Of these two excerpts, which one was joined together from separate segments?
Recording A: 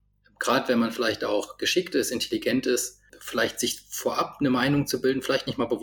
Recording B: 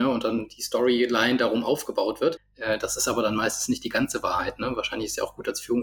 B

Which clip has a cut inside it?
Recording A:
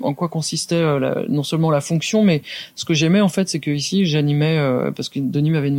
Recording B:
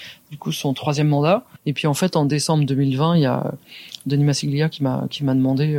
B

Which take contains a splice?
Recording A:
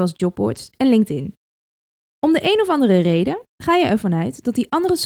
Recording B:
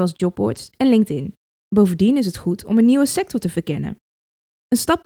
B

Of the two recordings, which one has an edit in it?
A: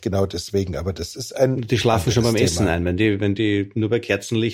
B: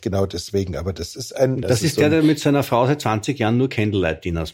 B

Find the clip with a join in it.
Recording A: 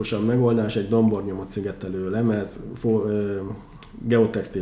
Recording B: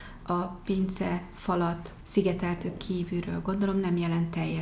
B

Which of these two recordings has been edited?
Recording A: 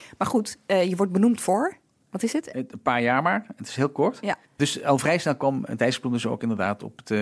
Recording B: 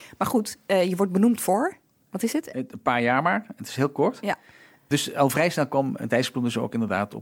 A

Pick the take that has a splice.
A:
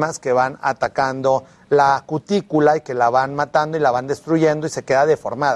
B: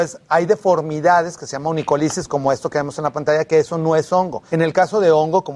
B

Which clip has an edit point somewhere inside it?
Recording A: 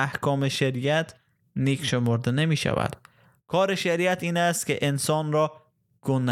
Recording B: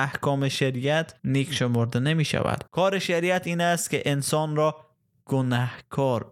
B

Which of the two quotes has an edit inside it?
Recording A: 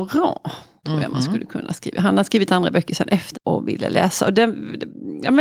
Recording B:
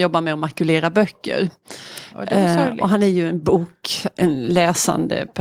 A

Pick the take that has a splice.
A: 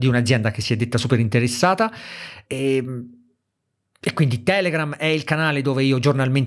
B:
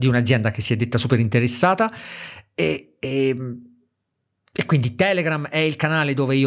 A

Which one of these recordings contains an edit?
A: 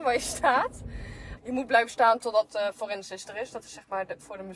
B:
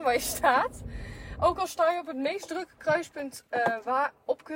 A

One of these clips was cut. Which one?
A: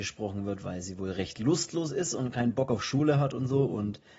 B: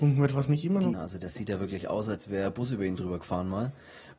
B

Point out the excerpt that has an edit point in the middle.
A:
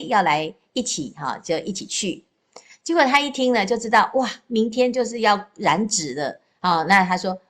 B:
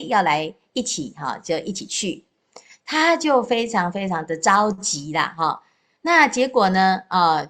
B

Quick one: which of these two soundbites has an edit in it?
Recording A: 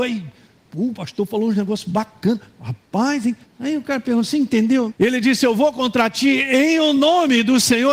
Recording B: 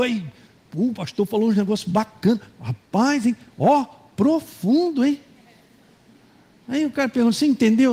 A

